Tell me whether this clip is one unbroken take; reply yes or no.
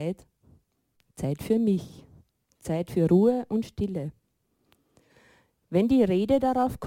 yes